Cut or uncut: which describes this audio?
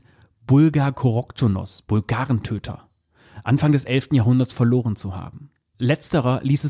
uncut